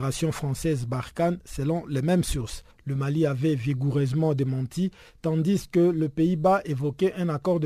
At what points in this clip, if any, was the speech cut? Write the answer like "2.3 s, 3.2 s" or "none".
2.7 s

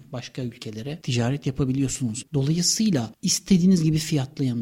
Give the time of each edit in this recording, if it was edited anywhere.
2.3 s

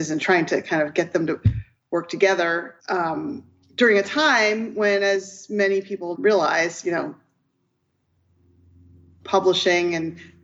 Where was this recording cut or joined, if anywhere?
2.8 s, 6.1 s

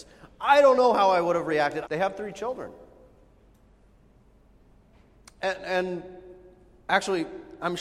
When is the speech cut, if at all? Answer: 1.9 s

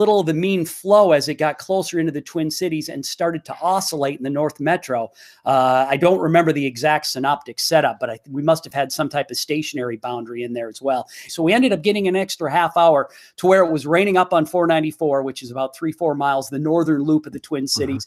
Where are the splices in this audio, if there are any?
11.3 s

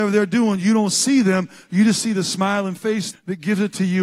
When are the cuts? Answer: 3.1 s

